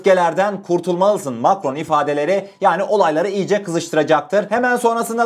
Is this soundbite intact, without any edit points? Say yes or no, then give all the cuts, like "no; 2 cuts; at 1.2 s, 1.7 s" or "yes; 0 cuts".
yes; 0 cuts